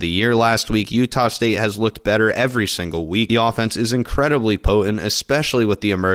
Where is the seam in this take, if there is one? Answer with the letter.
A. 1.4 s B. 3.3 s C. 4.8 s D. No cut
D